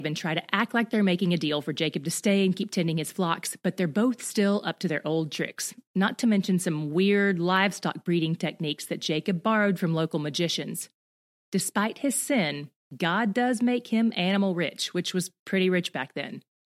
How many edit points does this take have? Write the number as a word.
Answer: zero